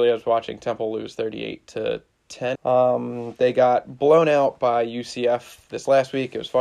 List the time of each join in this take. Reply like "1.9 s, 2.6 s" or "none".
2.6 s